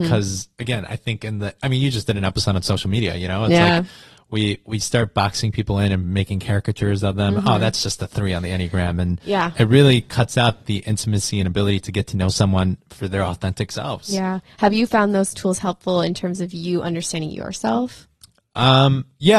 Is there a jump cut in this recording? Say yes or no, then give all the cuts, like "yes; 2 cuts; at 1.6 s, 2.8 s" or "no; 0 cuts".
no; 0 cuts